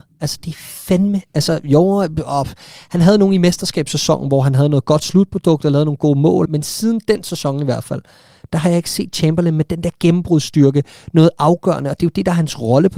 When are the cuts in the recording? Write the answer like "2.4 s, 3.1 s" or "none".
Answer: 6.5 s